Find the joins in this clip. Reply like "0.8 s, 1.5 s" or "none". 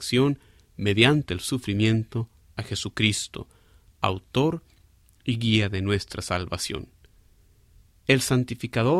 none

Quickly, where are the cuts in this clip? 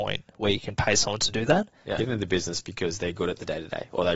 2.0 s

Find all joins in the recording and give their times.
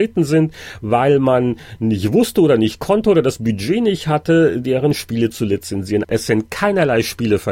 6.0 s

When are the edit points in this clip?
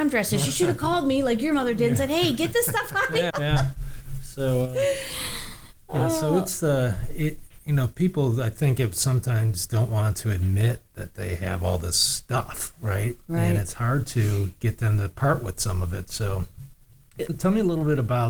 3.3 s

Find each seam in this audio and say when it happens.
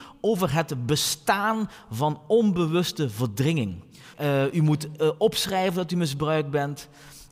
4.1 s

